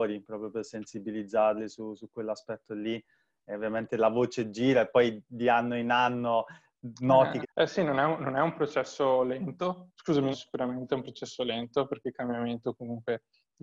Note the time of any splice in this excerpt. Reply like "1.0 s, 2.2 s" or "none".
7.4 s, 10.3 s

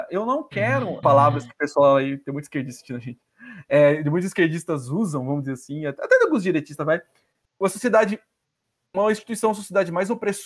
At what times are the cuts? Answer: 1.0 s

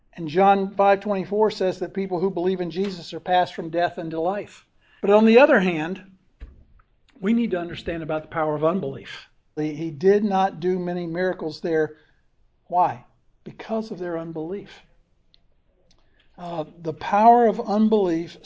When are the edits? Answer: 5.0 s, 9.6 s

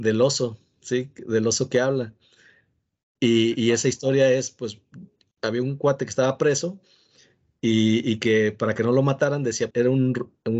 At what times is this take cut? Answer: 9.7 s

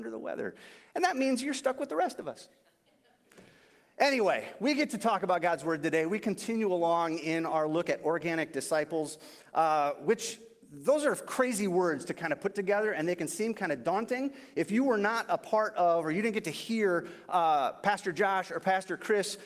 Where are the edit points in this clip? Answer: none

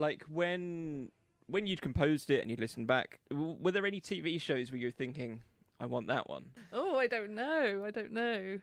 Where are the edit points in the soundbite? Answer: 3.3 s, 6.6 s

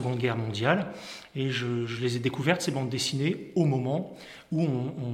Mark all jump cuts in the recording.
none

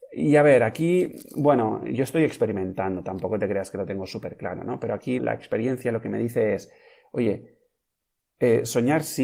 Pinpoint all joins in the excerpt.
5.2 s

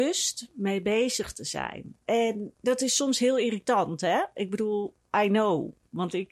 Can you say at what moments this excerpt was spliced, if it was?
none

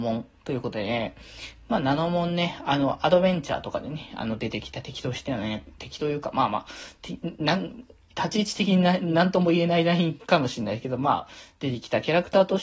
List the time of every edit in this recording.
none

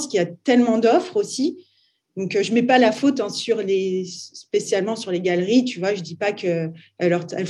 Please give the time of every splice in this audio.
none

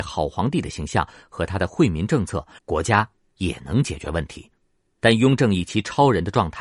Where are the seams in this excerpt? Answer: 2.6 s, 5.0 s

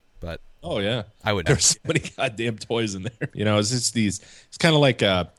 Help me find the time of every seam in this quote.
1.5 s, 3.3 s

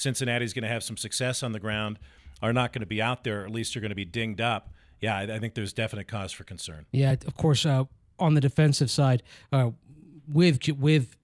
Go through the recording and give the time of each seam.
none

